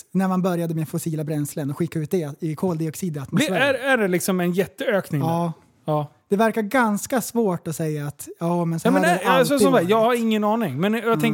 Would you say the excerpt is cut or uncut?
uncut